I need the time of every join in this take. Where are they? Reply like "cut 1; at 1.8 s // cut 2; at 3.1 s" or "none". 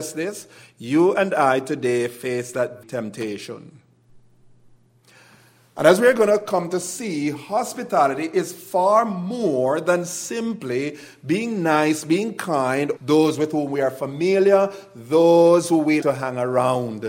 cut 1; at 2.8 s // cut 2; at 13.0 s // cut 3; at 16.0 s

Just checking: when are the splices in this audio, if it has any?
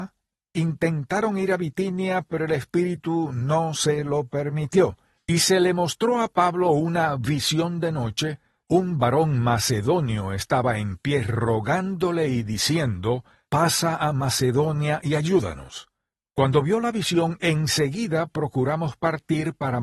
cut 1; at 5.2 s

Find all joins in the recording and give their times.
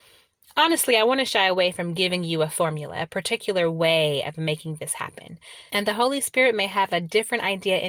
cut 1; at 5.7 s

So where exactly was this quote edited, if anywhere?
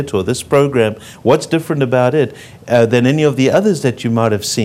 none

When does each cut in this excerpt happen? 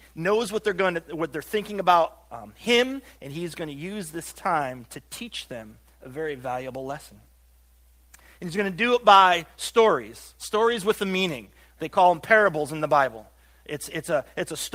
cut 1; at 3.2 s

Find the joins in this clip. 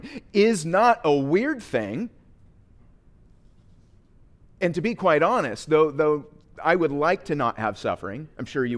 cut 1; at 4.5 s

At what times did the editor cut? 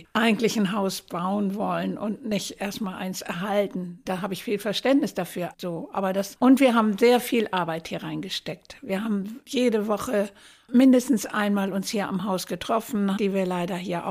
cut 1; at 4.1 s // cut 2; at 5.5 s // cut 3; at 13.2 s

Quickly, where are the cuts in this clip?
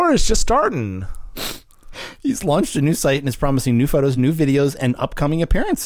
none

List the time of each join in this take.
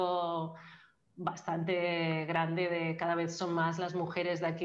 none

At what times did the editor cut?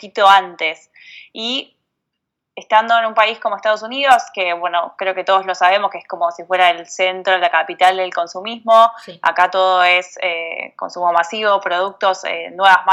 none

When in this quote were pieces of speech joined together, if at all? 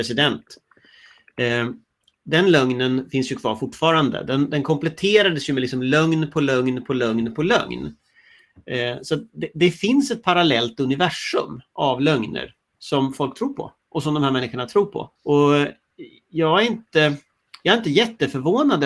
cut 1; at 15.2 s

